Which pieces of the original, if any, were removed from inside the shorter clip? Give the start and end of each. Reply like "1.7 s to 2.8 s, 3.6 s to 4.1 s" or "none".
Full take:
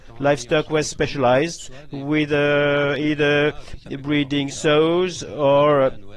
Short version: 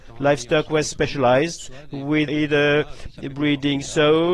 2.3 s to 3.0 s